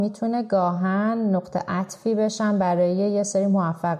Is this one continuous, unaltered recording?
yes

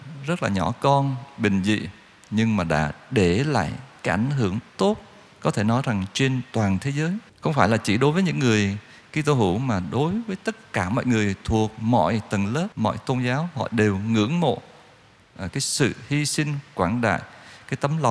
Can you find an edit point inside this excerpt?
yes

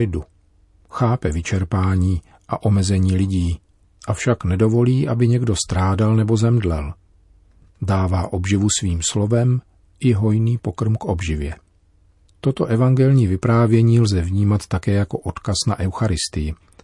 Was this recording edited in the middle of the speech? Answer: no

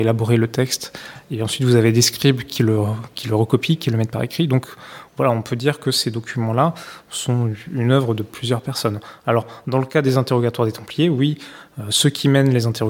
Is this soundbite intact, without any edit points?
yes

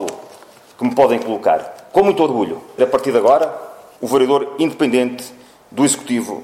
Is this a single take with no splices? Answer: no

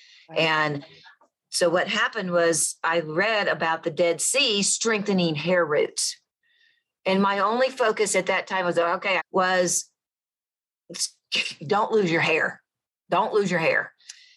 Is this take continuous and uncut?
no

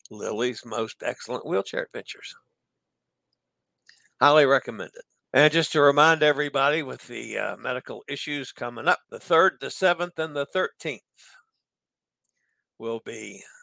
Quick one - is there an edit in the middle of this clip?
yes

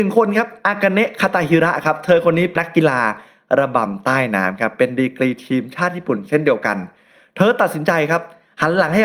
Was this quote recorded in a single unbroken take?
no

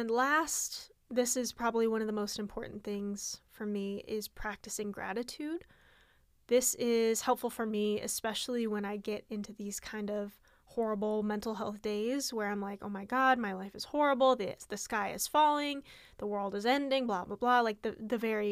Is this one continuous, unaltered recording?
yes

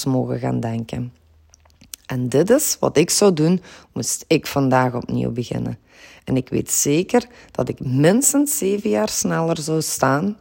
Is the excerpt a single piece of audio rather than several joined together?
yes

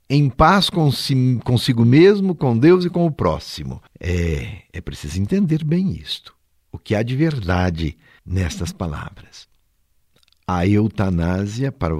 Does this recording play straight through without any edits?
yes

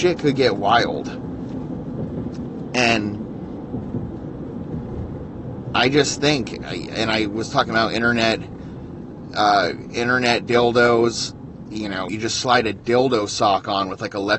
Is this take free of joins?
no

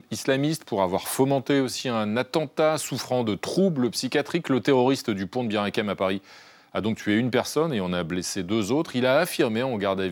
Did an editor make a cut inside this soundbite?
no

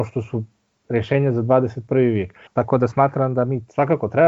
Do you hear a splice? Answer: yes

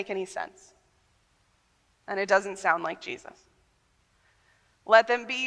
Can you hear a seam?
no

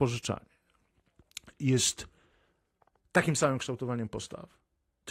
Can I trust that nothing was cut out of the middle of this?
yes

